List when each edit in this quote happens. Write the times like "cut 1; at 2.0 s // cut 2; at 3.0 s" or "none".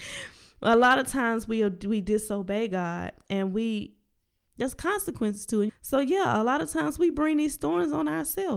cut 1; at 4.5 s // cut 2; at 5.7 s